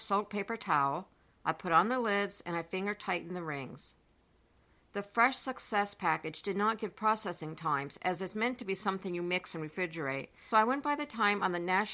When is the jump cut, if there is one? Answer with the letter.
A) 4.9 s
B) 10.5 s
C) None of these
B